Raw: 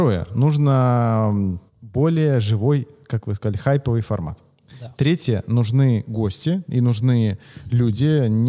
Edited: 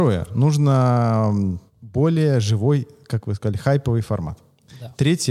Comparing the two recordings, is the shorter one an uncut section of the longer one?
yes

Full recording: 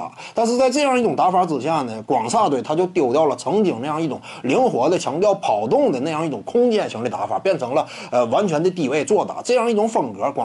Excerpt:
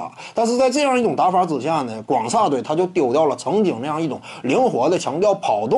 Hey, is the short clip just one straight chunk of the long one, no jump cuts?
yes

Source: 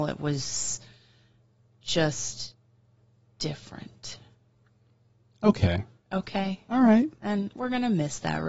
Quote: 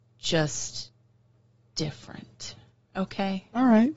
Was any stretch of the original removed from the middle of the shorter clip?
yes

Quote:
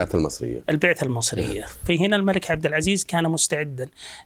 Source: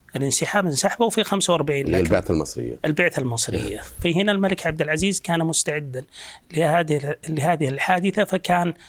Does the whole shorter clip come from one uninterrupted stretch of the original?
yes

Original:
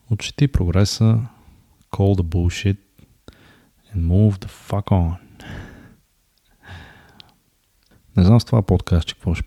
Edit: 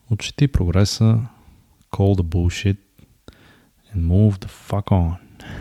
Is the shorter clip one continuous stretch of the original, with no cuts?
yes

